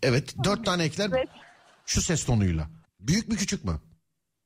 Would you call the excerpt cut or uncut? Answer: cut